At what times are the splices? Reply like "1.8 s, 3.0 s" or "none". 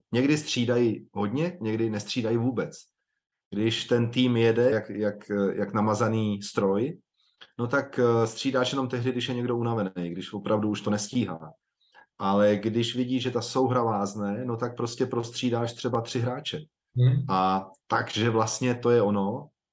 4.7 s

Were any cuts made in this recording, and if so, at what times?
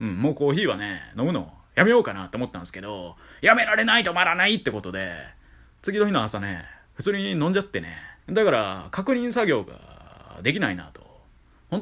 8.2 s

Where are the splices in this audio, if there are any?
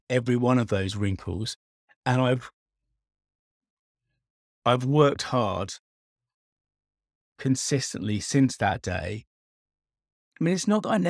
none

